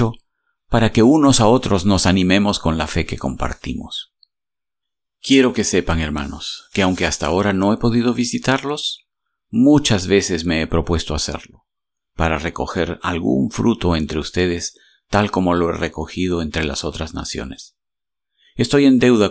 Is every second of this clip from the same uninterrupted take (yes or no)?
yes